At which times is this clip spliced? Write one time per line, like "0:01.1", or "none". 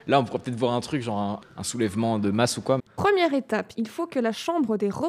0:01.4
0:02.9